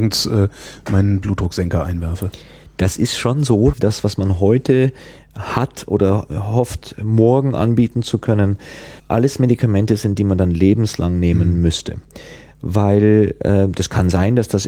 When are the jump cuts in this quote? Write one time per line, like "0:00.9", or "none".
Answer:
0:03.7
0:09.0